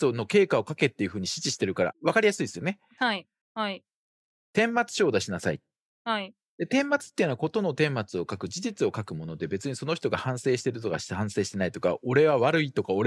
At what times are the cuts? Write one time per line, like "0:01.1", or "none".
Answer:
0:03.4